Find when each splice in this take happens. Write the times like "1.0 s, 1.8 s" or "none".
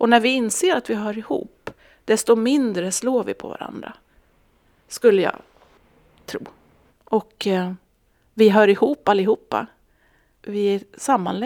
6.9 s